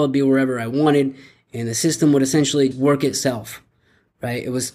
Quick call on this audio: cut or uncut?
cut